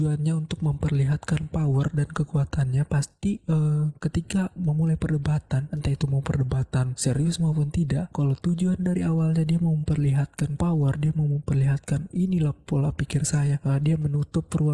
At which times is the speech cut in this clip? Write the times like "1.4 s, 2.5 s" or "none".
none